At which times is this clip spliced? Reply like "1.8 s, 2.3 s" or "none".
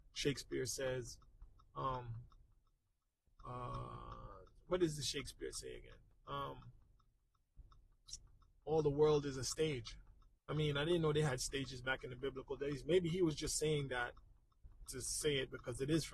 10.4 s, 14.8 s